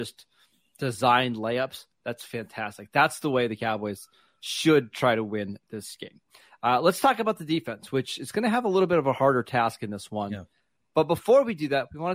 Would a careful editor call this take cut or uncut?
uncut